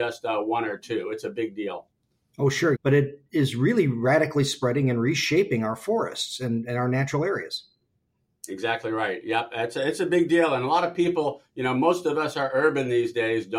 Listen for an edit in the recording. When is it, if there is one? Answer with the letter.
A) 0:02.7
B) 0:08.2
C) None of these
A